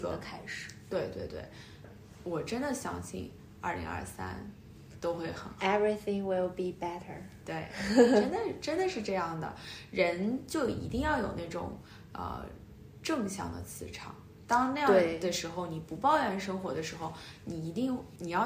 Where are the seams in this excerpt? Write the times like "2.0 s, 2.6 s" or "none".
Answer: none